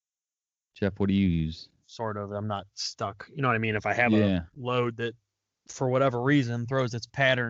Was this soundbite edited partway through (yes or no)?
yes